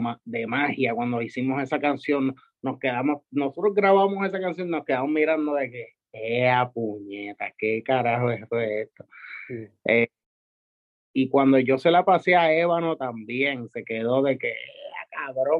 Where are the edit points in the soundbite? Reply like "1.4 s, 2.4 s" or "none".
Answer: none